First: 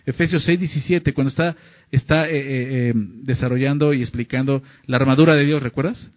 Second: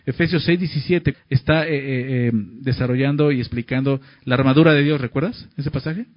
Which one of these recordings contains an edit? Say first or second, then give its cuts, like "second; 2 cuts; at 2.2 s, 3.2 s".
second; 1 cut; at 1.1 s